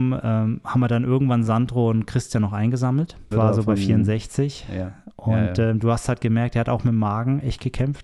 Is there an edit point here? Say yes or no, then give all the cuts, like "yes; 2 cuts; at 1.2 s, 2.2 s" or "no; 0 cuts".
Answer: yes; 1 cut; at 3.3 s